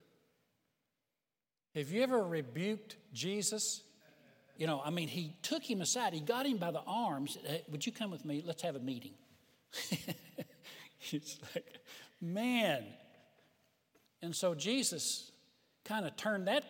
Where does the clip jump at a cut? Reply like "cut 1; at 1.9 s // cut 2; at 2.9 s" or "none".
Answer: cut 1; at 4.6 s // cut 2; at 14.1 s